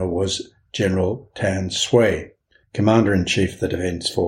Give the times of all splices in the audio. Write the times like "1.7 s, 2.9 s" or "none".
2.6 s